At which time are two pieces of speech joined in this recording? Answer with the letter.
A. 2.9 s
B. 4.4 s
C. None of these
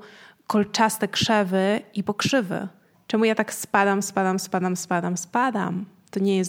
A